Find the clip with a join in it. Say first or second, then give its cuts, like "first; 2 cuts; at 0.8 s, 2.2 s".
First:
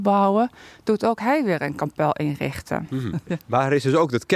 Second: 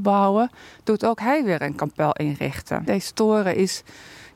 second; 1 cut; at 2.9 s